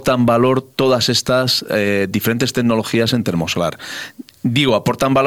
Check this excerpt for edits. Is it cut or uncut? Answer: uncut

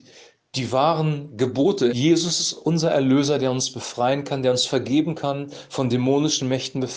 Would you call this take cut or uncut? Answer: cut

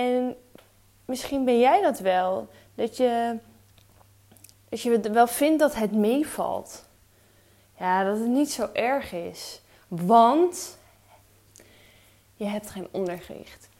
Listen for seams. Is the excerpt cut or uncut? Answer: uncut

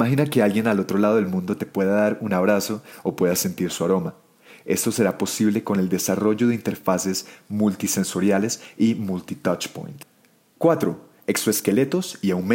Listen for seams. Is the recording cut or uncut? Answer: uncut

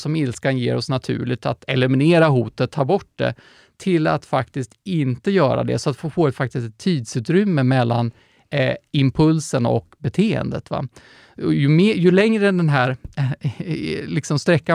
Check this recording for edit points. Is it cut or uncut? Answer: uncut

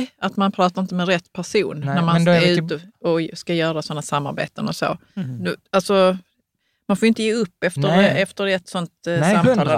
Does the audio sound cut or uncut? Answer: uncut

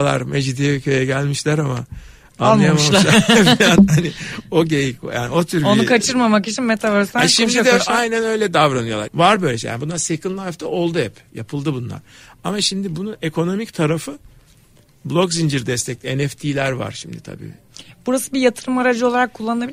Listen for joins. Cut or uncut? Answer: cut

